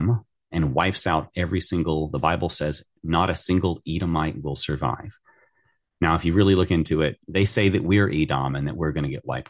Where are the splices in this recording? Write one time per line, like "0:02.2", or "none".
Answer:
0:07.2

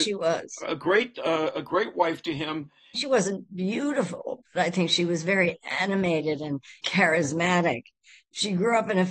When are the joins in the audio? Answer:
0:02.9
0:06.8

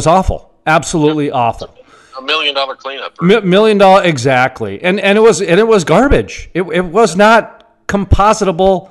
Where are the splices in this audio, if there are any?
none

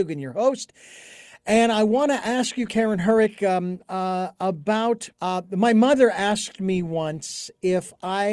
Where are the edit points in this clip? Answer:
0:02.7
0:05.1

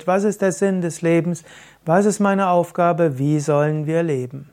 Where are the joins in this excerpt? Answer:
none

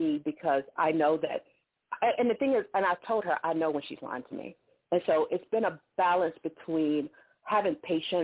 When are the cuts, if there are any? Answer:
none

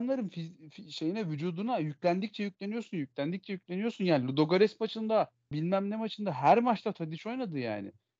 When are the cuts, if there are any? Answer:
0:05.5

